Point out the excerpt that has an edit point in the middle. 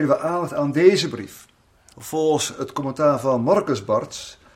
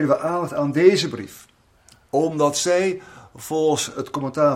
first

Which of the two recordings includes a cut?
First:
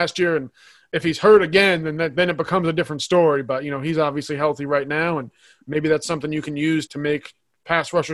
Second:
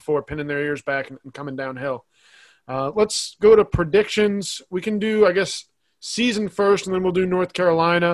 first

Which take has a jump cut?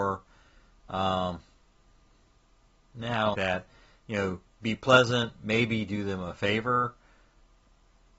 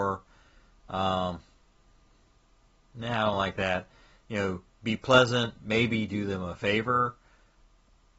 first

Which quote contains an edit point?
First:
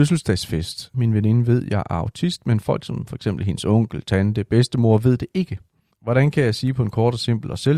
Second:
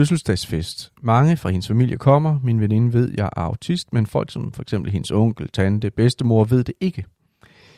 first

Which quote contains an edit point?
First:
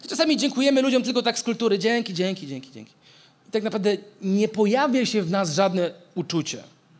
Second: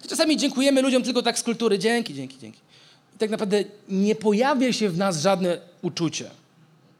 second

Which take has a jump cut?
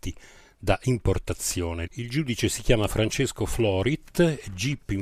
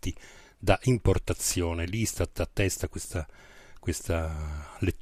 first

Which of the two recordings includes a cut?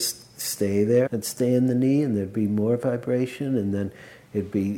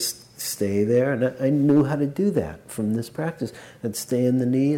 first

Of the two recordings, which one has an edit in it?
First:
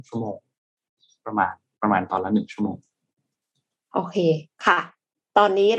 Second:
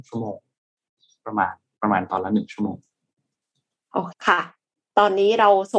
second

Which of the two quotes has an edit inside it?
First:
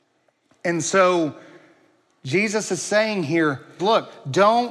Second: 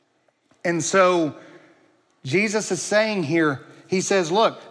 first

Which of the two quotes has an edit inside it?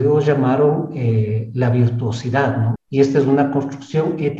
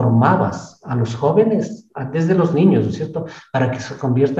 first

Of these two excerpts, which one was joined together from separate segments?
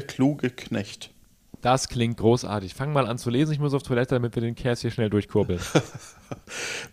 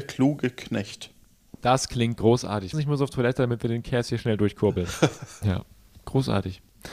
second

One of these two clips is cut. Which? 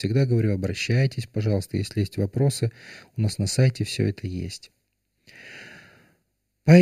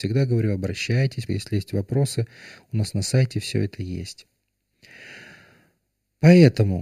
second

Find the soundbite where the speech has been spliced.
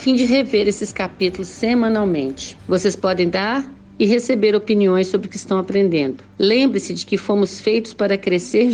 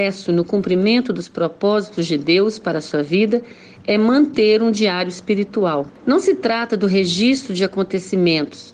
first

